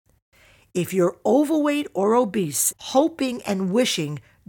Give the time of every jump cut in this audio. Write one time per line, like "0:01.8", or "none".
0:02.7